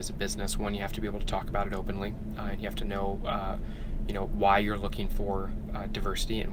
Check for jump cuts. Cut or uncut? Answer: uncut